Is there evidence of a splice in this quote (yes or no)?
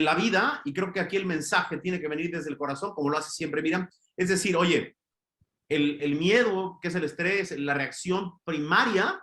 yes